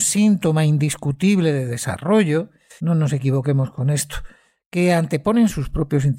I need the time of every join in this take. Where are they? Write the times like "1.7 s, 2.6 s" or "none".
2.8 s